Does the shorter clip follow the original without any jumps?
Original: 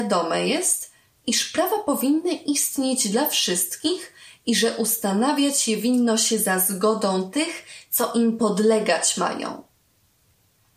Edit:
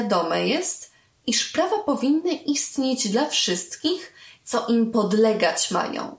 no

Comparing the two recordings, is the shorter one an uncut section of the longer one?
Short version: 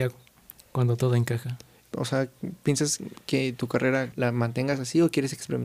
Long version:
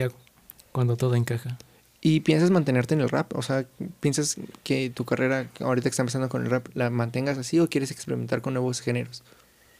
no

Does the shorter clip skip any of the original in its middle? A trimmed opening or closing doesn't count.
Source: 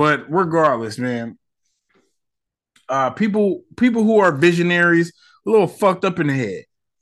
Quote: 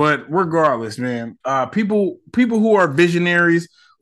yes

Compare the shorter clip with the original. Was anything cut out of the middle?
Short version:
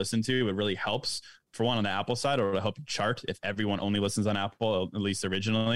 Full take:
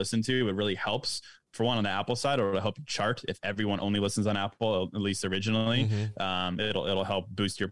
no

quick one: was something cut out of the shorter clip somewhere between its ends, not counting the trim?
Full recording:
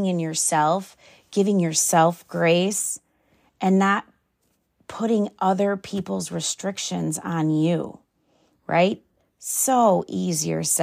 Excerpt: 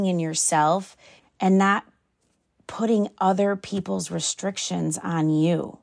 yes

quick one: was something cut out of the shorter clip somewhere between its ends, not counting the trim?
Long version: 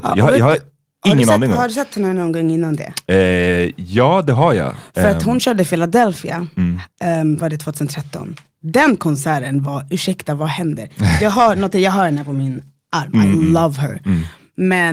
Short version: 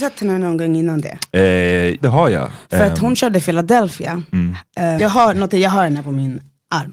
yes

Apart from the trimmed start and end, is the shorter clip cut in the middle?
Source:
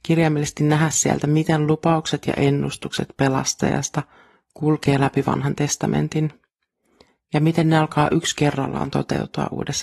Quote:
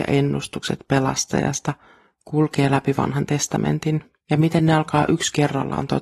yes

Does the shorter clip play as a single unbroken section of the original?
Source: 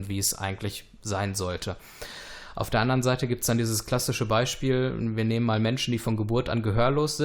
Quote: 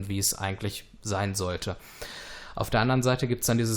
yes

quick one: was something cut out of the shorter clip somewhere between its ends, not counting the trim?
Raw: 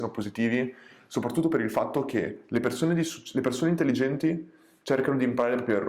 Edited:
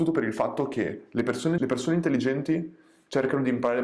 yes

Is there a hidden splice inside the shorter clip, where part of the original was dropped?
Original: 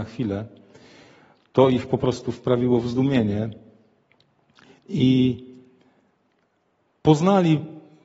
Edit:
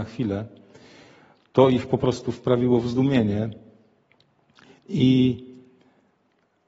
no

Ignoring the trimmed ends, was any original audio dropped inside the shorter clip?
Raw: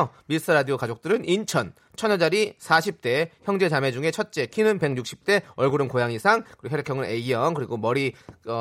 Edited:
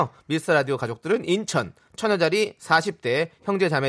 no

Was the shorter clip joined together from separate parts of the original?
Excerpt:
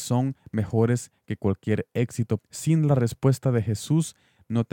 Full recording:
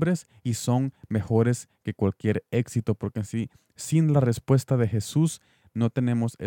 yes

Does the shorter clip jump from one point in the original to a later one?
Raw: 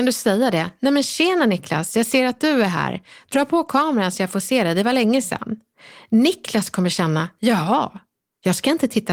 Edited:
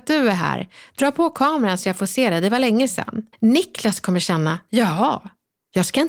yes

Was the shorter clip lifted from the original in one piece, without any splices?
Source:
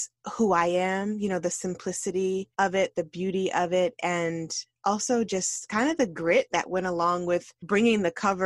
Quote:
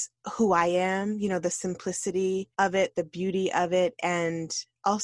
yes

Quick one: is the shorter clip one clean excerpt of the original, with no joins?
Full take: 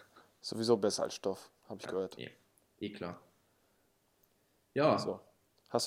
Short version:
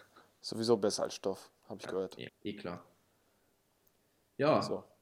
no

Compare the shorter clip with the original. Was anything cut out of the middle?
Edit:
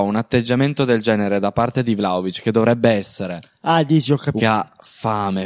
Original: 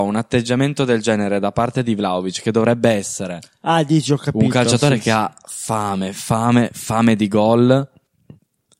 yes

